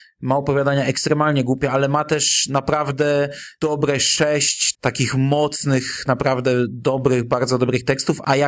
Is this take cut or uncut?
cut